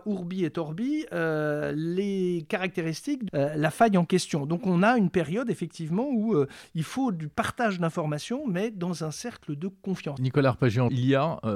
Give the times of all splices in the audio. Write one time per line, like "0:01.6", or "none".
0:03.3